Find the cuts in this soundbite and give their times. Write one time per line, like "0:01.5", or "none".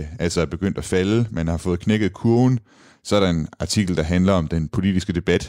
none